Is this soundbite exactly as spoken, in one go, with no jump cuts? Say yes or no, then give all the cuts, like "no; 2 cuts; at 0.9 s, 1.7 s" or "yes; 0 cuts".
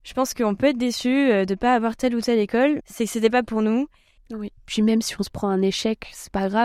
no; 2 cuts; at 2.8 s, 4.2 s